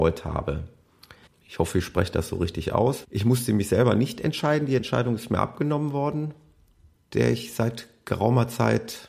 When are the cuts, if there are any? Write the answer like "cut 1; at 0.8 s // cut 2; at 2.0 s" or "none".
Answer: cut 1; at 1.3 s // cut 2; at 3.0 s // cut 3; at 6.9 s